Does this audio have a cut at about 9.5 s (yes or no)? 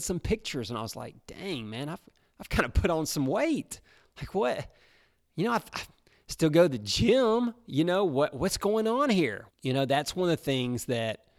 yes